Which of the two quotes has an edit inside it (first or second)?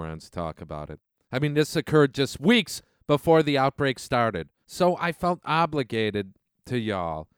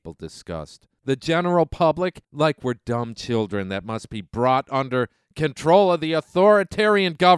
second